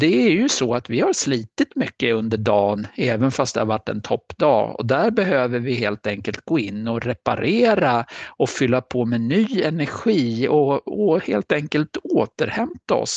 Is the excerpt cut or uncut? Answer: uncut